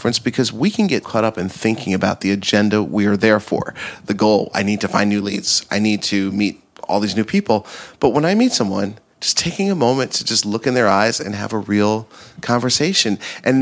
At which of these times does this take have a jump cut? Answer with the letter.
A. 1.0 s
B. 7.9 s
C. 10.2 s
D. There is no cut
A